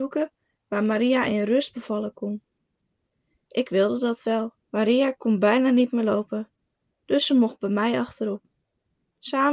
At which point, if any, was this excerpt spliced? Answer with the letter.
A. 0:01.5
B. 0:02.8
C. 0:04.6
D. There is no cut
C